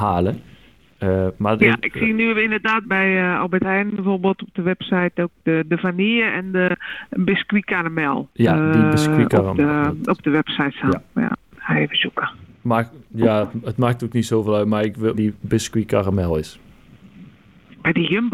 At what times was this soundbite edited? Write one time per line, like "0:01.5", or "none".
0:02.8
0:11.5
0:15.1

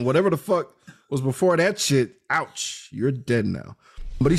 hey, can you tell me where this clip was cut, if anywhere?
none

